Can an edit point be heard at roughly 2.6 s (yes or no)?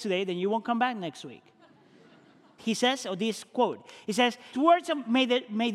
yes